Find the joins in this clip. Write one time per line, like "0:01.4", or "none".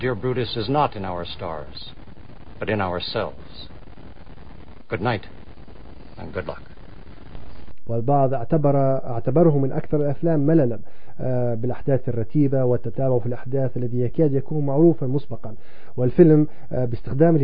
0:07.9